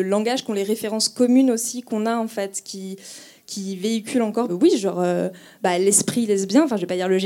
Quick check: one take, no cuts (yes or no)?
no